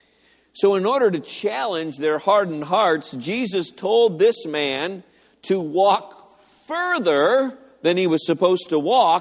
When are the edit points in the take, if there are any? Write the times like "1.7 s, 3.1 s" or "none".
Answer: none

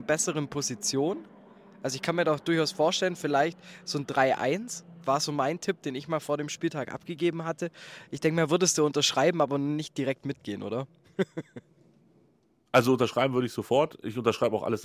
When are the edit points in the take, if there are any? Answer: none

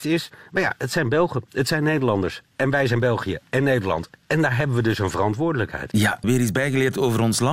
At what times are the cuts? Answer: 6.2 s

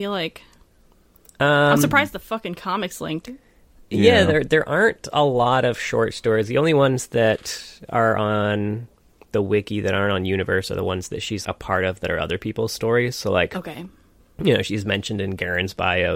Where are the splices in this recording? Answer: 11.4 s

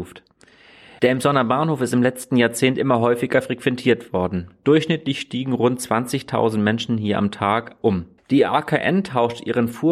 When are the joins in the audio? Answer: 1.0 s, 8.2 s

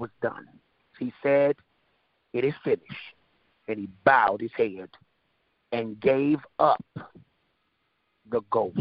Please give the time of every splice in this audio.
0.9 s

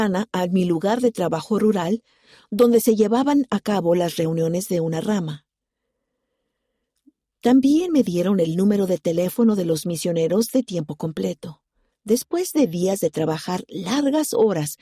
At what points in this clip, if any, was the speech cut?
11.9 s

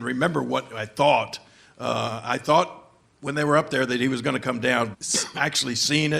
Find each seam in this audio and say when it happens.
4.9 s

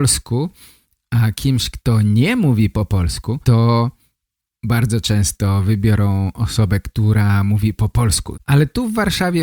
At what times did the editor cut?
3.4 s, 8.3 s

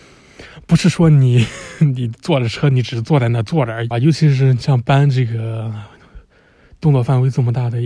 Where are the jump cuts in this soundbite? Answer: 3.9 s

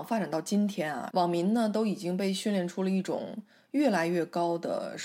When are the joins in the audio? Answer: 1.1 s

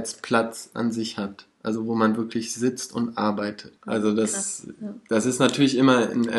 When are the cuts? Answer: 3.8 s

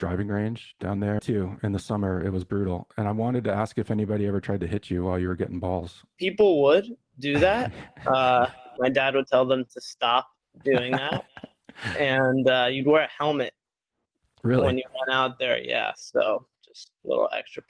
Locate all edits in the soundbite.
1.2 s

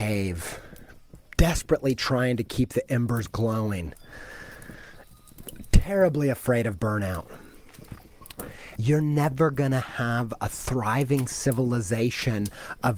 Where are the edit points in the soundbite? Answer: 8.8 s

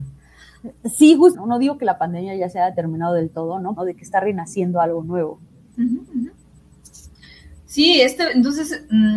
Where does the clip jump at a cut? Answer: 1.3 s, 3.8 s

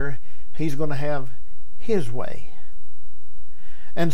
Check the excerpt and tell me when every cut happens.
none

